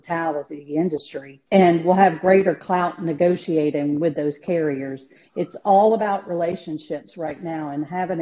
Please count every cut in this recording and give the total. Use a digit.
1